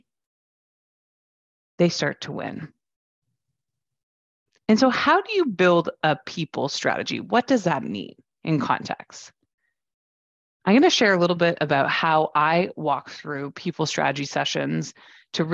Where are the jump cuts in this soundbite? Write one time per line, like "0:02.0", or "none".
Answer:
none